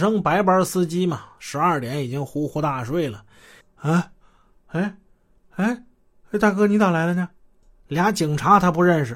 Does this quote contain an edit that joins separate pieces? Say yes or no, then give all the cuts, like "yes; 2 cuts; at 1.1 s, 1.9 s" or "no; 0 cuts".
yes; 1 cut; at 3.6 s